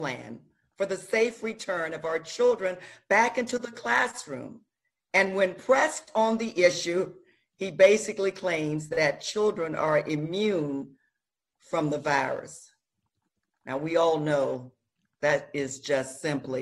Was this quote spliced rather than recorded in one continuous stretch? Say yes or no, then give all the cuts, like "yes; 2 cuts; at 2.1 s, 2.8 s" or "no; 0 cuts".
no; 0 cuts